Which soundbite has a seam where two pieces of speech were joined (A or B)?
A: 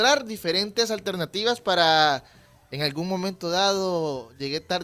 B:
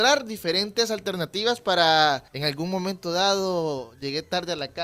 B